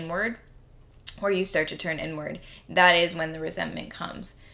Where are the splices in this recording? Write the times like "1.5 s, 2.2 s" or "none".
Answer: none